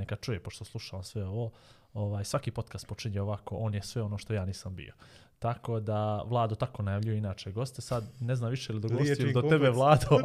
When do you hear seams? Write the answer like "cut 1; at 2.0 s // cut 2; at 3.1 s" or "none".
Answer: none